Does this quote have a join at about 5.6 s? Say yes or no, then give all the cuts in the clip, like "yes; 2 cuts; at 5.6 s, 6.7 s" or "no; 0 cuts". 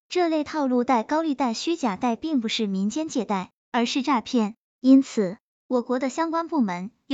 yes; 1 cut; at 5.6 s